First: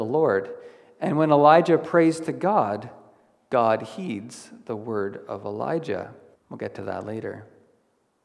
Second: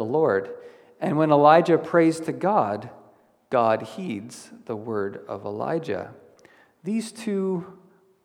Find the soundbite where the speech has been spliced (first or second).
first